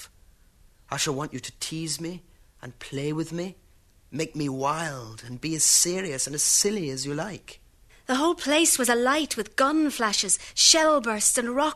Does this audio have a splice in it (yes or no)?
yes